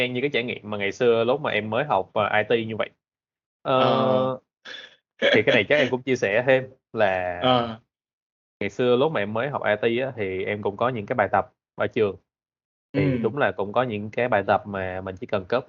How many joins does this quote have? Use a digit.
0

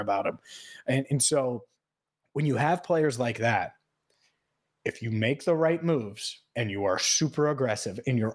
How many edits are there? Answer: 0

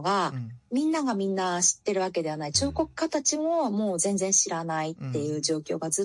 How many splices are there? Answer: 0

